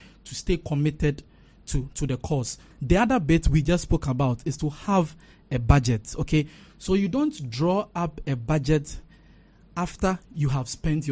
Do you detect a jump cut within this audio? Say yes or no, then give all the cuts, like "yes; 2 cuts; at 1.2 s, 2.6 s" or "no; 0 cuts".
yes; 1 cut; at 2.7 s